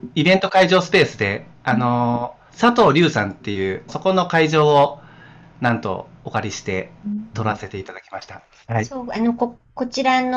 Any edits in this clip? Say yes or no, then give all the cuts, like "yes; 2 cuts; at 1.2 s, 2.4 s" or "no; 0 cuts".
yes; 2 cuts; at 2.5 s, 3.9 s